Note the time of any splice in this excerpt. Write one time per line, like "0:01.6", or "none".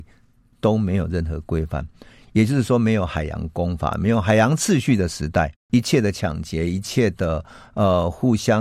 none